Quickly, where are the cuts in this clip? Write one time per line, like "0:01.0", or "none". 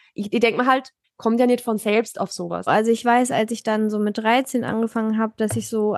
0:01.0
0:02.7